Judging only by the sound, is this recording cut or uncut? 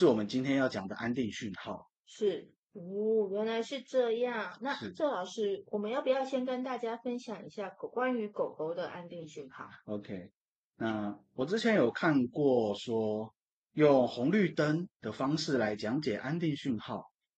cut